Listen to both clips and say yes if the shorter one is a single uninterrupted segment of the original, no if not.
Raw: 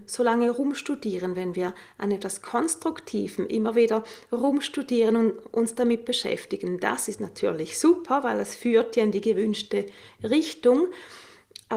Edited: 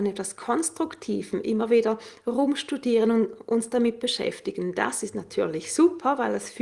yes